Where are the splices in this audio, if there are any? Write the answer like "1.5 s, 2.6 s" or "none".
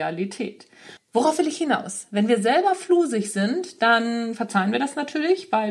1.0 s